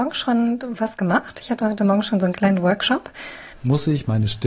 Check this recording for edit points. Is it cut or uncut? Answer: cut